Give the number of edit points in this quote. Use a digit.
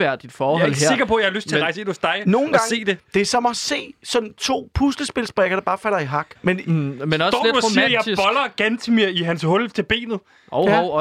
1